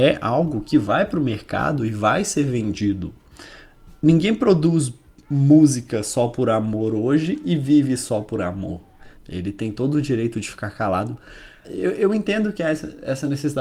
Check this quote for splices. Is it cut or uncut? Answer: cut